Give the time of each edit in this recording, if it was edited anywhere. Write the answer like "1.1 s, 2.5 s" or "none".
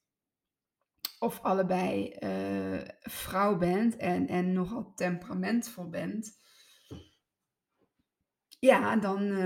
none